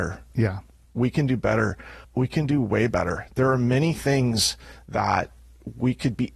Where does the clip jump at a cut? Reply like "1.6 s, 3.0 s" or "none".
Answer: none